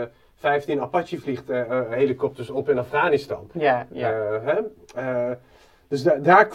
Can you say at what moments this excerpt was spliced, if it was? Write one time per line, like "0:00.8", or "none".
0:03.9